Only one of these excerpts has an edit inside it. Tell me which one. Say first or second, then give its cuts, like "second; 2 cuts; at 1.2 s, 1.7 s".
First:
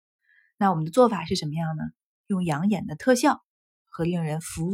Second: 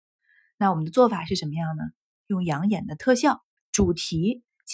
second; 1 cut; at 3.6 s